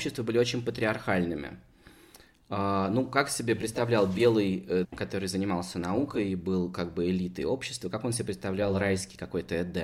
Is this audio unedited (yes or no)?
no